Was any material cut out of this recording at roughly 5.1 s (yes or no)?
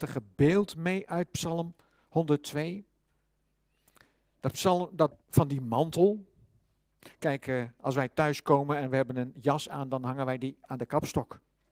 yes